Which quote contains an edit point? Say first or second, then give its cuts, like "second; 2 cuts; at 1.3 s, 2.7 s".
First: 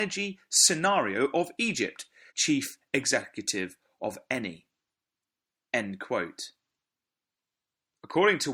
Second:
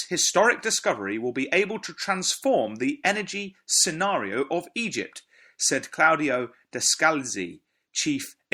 first; 1 cut; at 2.3 s